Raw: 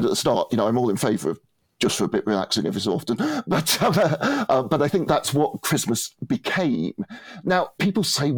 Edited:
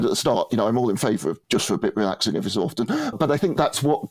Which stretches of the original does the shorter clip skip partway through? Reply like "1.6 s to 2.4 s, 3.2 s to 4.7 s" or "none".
1.4 s to 1.7 s, 3.4 s to 4.6 s